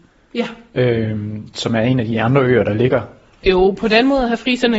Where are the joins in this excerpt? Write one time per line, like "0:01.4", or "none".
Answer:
0:03.4